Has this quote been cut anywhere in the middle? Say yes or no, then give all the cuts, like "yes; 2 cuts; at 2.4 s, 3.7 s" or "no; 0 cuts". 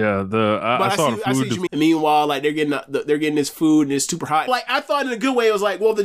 yes; 2 cuts; at 1.7 s, 4.5 s